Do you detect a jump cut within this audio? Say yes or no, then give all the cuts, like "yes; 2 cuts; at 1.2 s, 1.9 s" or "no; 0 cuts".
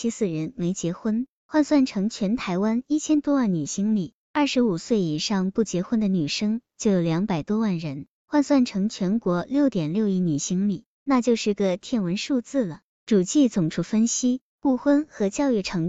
no; 0 cuts